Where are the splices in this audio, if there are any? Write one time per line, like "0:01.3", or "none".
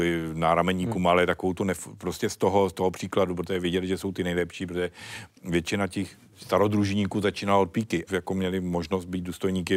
0:08.1